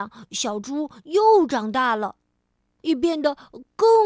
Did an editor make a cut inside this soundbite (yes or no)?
yes